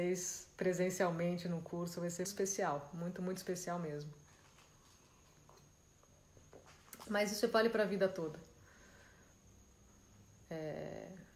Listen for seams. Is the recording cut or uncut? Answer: cut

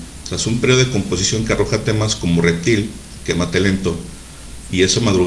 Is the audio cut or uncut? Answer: uncut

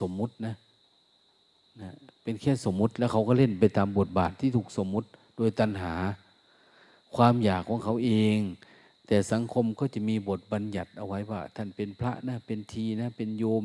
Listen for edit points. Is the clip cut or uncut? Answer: uncut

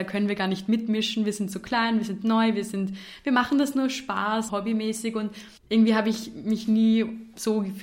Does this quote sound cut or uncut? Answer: cut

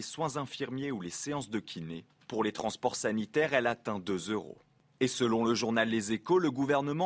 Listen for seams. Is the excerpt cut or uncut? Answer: uncut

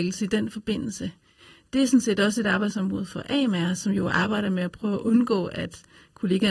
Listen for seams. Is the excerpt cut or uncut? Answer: uncut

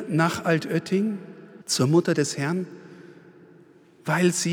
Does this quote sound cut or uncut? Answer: cut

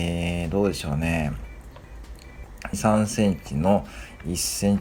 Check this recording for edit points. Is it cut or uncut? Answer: cut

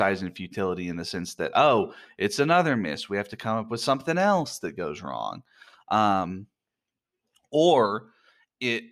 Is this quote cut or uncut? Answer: uncut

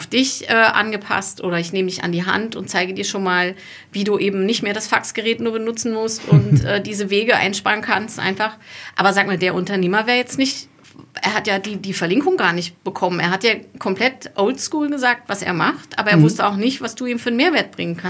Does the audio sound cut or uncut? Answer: uncut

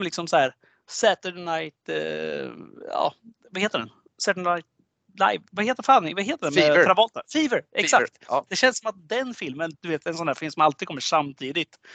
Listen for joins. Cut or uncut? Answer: cut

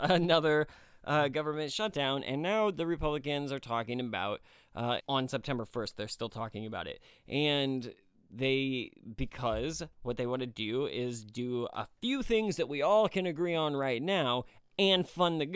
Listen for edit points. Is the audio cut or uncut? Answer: cut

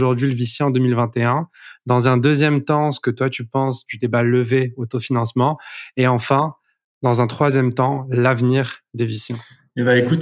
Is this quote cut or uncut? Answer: uncut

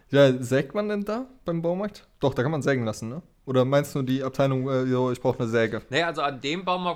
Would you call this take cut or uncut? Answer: uncut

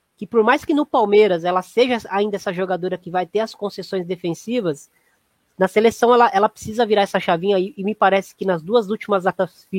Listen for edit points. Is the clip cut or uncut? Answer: uncut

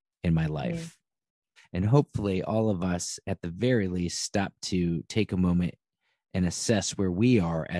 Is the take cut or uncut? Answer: cut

